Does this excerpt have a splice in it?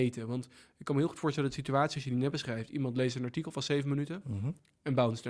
no; 0 cuts

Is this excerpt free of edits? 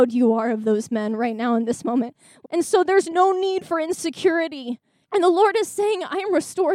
no; 2 cuts; at 2.4 s, 5.0 s

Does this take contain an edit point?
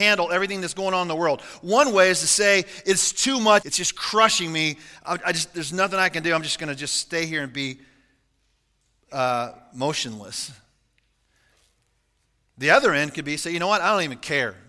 yes; 1 cut; at 3.6 s

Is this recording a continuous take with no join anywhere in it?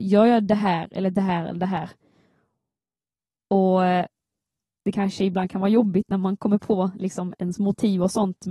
no; 1 cut; at 7.4 s

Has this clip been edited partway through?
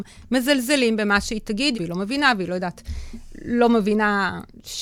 yes; 1 cut; at 1.7 s

